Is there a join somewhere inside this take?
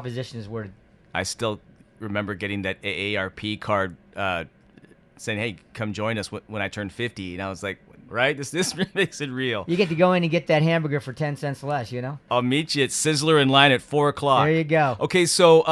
yes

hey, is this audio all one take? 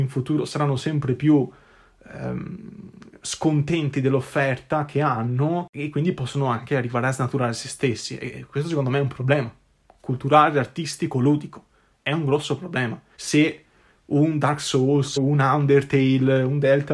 no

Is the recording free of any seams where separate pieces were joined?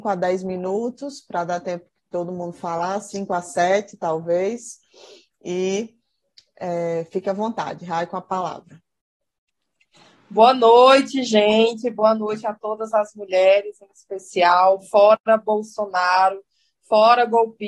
yes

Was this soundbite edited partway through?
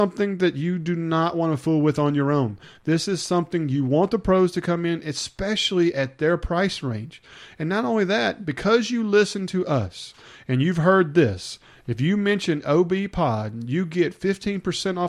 no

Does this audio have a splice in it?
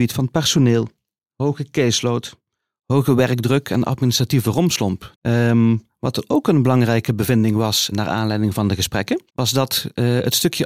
yes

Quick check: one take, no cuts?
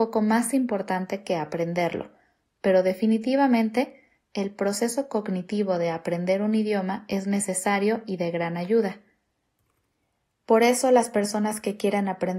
yes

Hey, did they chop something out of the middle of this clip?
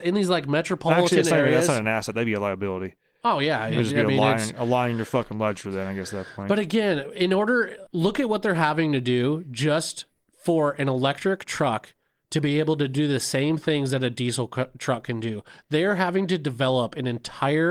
yes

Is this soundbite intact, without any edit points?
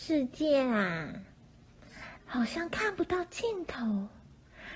no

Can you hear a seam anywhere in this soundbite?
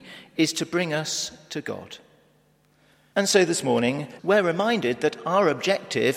yes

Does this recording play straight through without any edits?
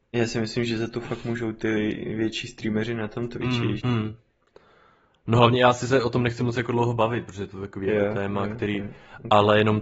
no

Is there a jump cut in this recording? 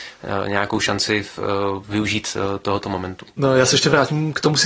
no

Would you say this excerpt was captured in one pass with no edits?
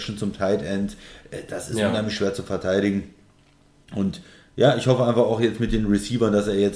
yes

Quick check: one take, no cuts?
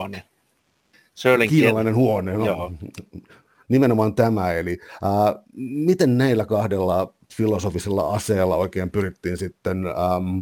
yes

